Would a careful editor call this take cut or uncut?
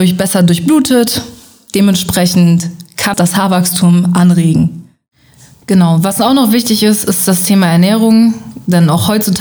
cut